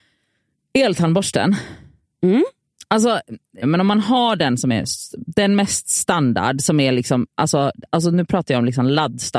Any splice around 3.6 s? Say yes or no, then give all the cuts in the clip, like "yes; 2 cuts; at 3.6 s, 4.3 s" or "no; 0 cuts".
yes; 1 cut; at 3.6 s